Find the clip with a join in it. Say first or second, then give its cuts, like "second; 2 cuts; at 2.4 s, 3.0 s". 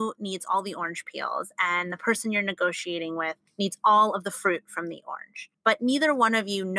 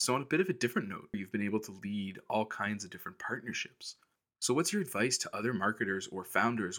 second; 1 cut; at 1.1 s